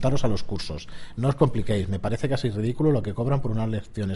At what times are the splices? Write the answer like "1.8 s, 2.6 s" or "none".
none